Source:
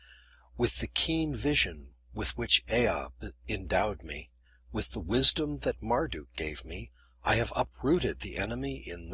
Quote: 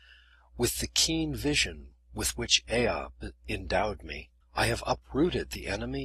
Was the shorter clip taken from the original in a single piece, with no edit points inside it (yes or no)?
no